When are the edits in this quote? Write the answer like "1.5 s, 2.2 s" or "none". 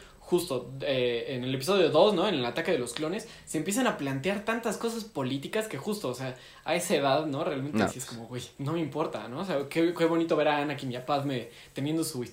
8.5 s